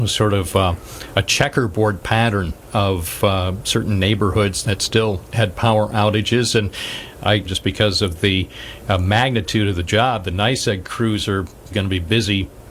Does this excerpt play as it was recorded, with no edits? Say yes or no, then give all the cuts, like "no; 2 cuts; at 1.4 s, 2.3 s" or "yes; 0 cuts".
no; 3 cuts; at 4.6 s, 7.4 s, 11.7 s